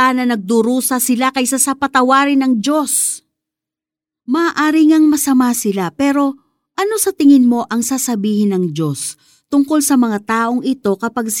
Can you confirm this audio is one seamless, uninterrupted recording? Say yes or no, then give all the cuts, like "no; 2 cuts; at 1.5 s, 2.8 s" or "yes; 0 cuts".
yes; 0 cuts